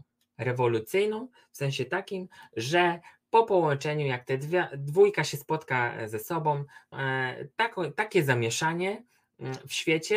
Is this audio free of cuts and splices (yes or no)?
no